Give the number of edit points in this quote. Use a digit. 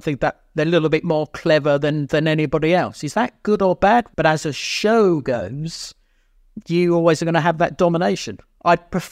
1